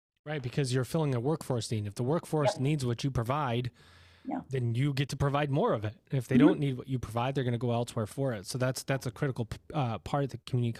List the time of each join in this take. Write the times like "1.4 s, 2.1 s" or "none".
none